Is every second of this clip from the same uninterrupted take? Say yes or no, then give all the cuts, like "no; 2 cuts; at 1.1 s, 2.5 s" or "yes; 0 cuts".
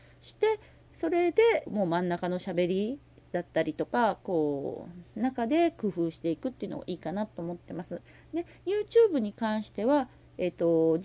no; 2 cuts; at 1.7 s, 4.2 s